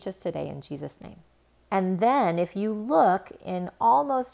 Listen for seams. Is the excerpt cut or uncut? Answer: cut